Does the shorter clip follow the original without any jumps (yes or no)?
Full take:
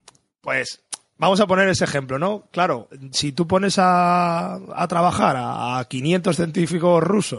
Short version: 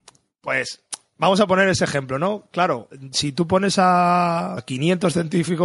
no